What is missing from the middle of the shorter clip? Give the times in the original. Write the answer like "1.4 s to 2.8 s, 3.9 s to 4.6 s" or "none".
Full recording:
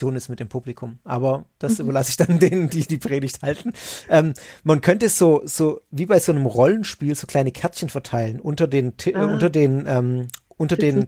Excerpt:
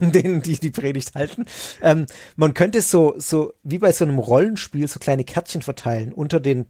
none